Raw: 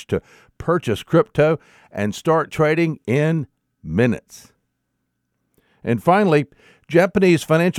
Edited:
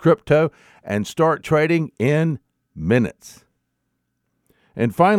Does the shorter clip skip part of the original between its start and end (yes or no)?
no